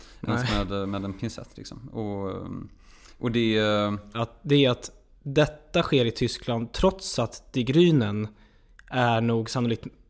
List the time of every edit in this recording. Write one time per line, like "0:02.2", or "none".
0:04.1